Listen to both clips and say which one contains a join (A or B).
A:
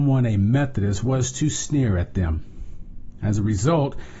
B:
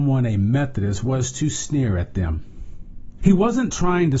B